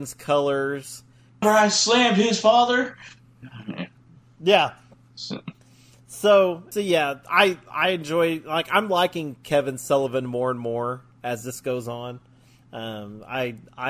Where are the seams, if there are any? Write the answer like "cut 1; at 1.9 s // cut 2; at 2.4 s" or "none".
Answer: cut 1; at 1.4 s // cut 2; at 6.7 s